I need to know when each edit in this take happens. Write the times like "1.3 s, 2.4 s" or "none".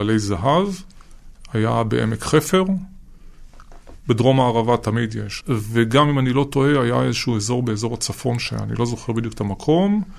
5.4 s